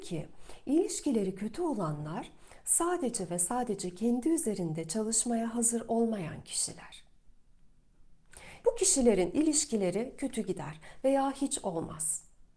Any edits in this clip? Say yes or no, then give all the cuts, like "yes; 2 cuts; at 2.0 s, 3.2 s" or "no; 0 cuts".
yes; 1 cut; at 8.6 s